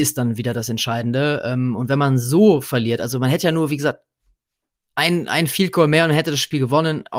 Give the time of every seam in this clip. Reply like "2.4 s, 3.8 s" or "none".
none

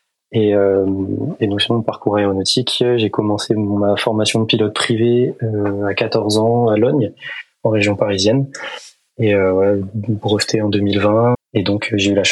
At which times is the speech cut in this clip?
11.3 s

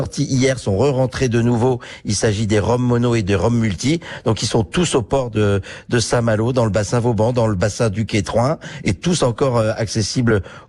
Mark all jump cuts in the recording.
none

